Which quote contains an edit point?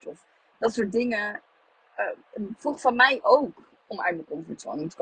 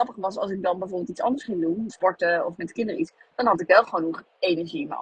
second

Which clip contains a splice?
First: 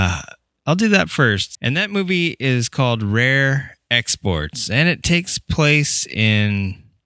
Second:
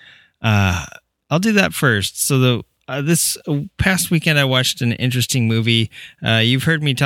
first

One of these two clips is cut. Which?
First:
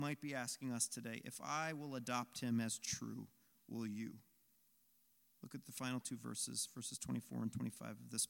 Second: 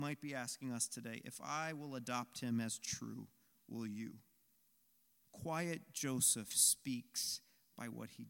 second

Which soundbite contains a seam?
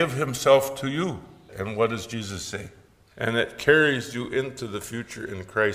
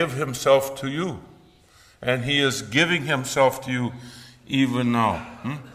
first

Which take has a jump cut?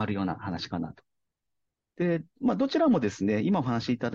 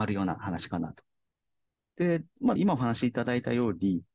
second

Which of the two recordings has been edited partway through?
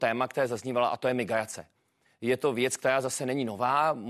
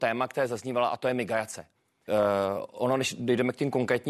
second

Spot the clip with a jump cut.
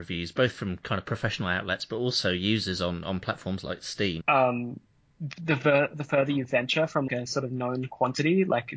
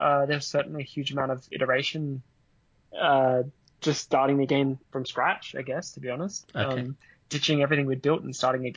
first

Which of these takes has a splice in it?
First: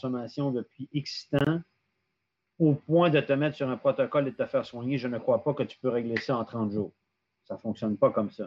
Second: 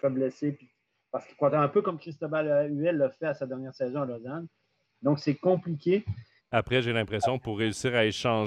second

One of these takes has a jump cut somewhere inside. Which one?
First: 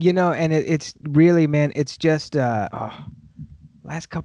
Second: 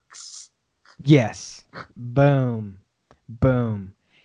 first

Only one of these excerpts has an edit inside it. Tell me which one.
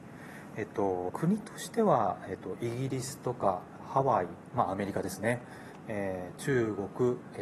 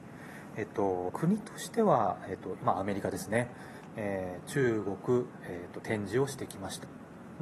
second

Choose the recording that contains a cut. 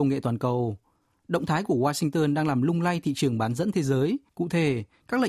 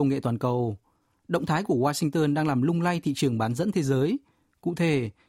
first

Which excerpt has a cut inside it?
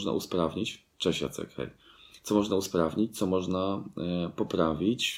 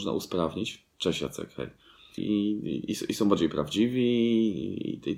second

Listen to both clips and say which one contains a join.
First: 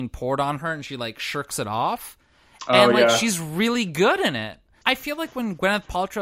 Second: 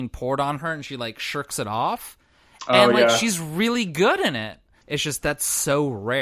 second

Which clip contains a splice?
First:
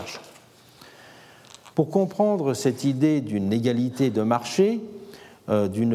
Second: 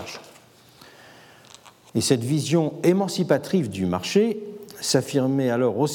first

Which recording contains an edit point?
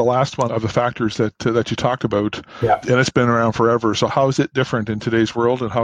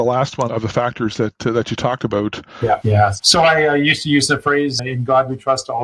second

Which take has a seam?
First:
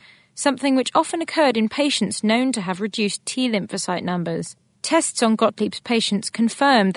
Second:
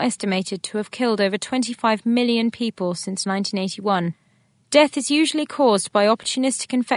first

